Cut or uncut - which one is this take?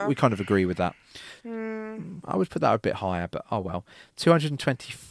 cut